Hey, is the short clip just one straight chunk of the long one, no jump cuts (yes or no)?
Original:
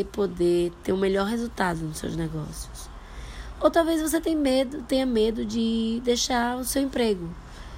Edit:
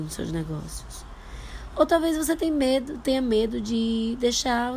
yes